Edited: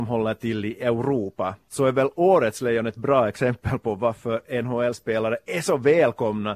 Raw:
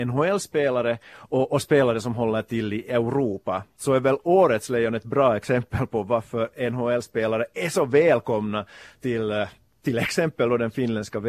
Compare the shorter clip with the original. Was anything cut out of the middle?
no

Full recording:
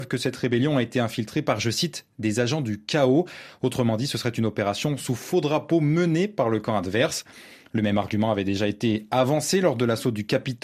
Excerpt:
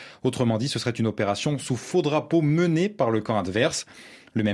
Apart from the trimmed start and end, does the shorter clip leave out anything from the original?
no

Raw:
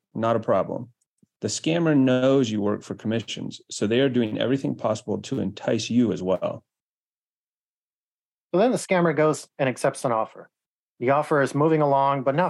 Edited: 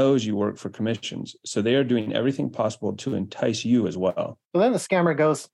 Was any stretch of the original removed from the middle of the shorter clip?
yes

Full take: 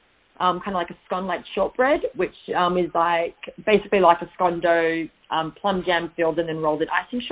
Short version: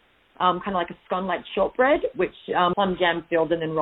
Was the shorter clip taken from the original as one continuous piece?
no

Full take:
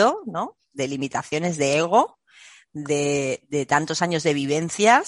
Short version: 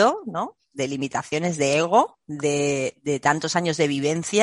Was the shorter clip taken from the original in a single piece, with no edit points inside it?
no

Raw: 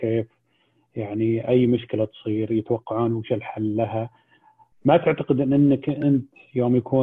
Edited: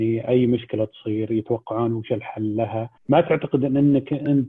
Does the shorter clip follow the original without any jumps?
no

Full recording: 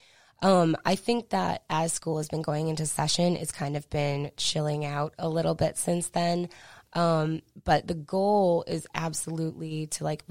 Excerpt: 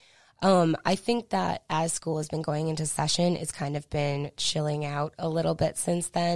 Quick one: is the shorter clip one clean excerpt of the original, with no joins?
yes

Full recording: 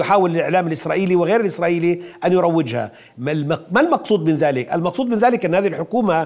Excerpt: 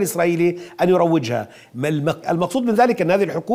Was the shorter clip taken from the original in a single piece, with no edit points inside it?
no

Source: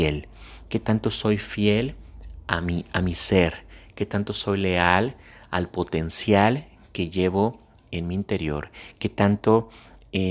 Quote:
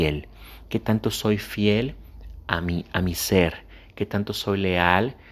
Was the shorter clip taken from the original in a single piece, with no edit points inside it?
yes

